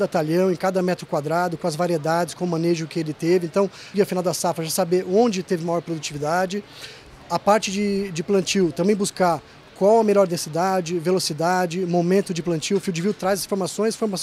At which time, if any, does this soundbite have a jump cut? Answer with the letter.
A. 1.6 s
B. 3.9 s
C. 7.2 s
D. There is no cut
B